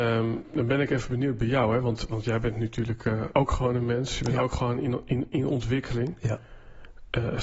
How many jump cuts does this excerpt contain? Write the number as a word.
one